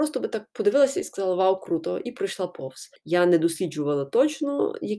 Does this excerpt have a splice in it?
yes; 1 cut; at 3.0 s

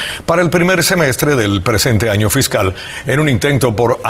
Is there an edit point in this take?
no; 0 cuts

